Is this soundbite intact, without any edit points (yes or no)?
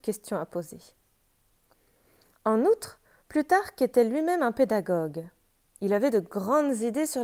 yes